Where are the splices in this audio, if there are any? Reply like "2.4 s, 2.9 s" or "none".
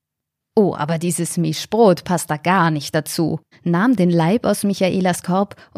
3.5 s